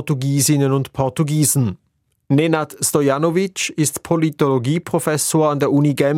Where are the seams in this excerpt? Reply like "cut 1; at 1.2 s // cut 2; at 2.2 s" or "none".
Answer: none